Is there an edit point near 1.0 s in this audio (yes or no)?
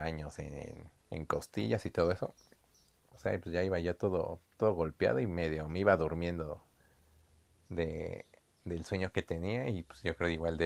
yes